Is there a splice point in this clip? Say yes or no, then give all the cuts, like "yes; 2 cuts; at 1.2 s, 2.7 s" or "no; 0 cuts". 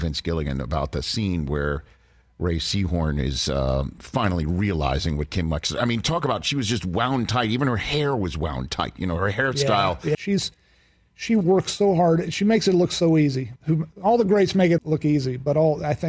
yes; 3 cuts; at 10.1 s, 13.6 s, 14.8 s